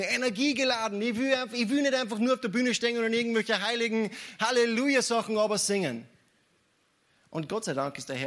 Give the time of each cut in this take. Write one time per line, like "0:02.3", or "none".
none